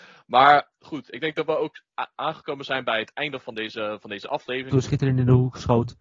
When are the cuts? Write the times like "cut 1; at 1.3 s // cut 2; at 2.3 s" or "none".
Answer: cut 1; at 4.7 s